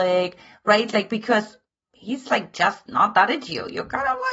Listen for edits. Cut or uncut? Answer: uncut